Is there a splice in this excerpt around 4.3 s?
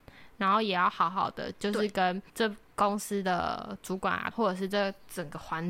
yes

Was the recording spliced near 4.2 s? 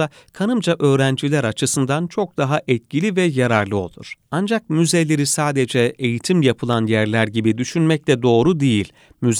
yes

